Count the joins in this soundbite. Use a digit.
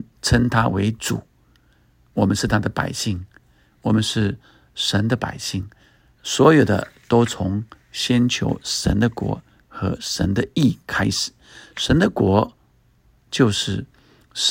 1